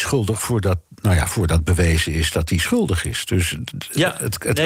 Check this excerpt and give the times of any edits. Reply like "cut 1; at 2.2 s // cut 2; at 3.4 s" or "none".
none